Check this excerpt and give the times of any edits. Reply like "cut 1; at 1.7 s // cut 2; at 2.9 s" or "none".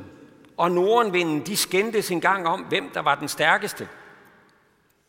none